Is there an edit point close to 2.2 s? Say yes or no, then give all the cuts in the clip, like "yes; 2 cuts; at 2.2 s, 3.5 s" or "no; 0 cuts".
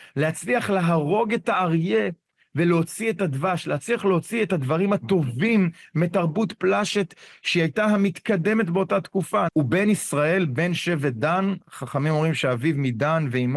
no; 1 cut; at 9.5 s